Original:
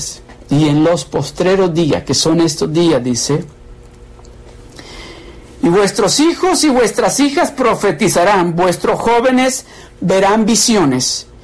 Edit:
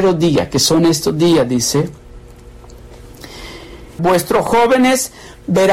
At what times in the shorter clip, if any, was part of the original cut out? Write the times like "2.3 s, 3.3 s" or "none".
4.0 s